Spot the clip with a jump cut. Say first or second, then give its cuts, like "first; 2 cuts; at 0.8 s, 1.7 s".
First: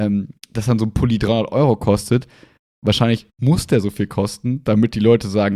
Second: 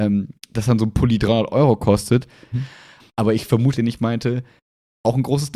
second; 2 cuts; at 2.5 s, 3.7 s